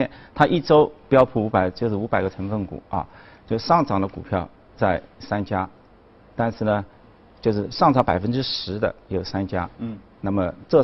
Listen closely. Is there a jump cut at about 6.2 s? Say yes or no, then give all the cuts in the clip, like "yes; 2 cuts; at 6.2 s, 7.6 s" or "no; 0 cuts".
no; 0 cuts